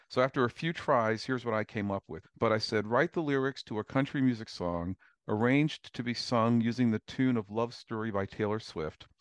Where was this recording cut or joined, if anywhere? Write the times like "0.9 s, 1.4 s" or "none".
2.2 s